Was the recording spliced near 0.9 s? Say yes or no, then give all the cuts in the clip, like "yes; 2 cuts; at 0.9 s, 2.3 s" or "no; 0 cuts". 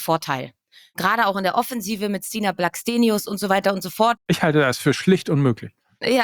no; 1 cut; at 4.2 s